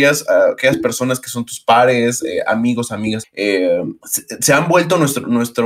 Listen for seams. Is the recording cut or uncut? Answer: cut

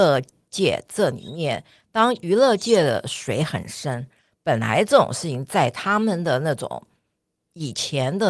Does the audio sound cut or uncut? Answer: uncut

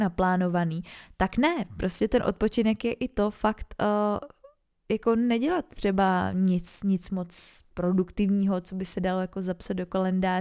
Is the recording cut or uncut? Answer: uncut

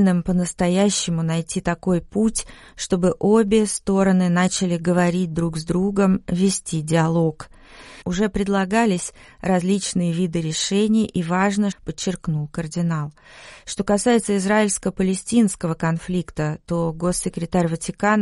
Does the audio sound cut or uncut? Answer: cut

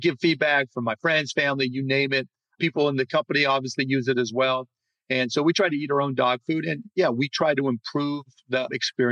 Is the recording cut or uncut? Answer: uncut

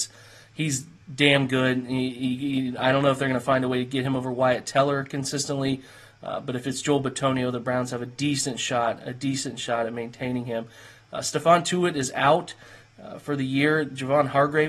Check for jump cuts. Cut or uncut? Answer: uncut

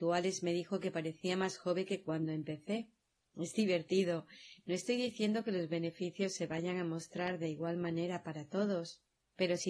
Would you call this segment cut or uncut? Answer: uncut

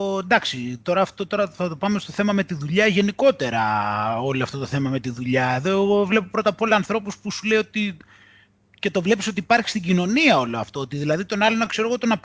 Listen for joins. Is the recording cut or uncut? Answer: uncut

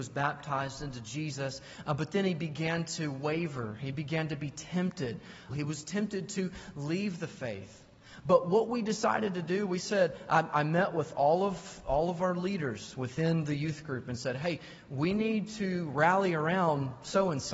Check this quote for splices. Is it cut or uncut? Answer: cut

